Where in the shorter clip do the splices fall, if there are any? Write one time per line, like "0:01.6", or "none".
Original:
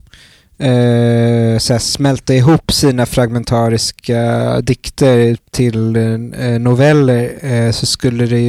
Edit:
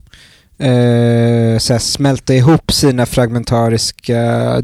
none